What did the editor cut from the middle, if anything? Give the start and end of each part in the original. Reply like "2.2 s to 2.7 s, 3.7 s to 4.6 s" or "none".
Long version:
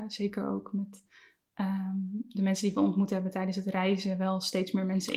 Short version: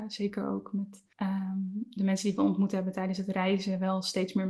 1.1 s to 1.5 s